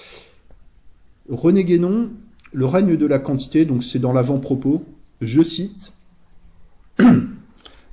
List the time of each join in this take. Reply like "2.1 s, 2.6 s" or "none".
none